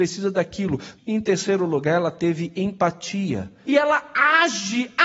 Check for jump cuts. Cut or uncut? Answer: cut